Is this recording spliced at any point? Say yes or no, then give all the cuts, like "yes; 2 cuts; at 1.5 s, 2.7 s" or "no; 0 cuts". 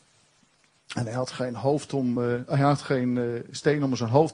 no; 0 cuts